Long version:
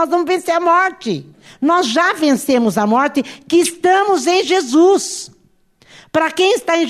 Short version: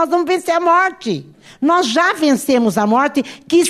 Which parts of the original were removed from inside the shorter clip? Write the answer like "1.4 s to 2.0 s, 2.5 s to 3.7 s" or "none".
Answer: none